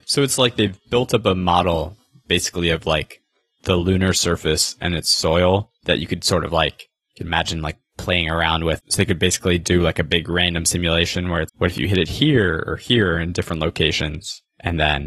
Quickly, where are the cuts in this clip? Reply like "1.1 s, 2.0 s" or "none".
8.8 s, 11.5 s